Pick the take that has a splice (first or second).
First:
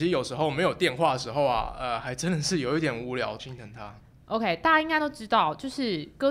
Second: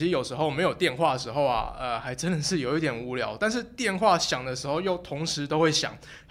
first